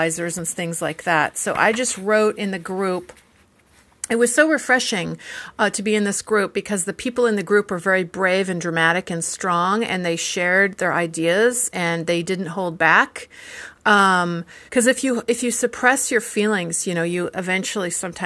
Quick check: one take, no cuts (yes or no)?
no